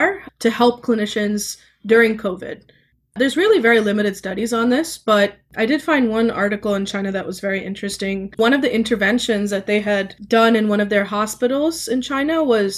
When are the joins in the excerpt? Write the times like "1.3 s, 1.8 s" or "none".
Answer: none